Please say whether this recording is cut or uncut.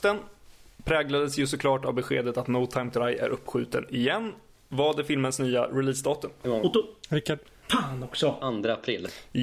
cut